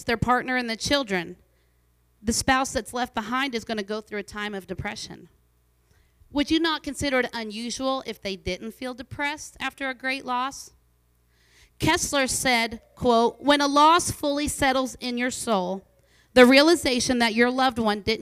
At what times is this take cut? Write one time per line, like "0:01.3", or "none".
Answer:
none